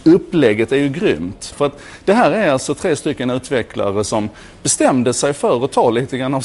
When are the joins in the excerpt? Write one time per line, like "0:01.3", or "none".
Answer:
0:01.5